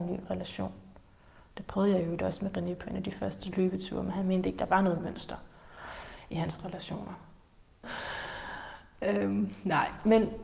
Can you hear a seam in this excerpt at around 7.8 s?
yes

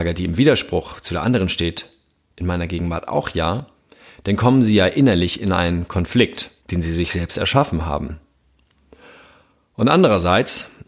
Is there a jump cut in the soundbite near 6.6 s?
yes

